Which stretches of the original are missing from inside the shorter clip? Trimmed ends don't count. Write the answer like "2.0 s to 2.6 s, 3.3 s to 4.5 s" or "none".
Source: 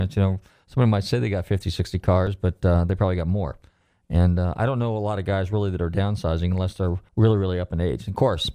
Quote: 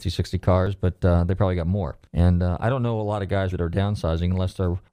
3.7 s to 4.0 s, 5.5 s to 5.7 s